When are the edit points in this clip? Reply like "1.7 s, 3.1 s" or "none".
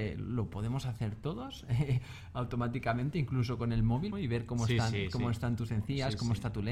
4.1 s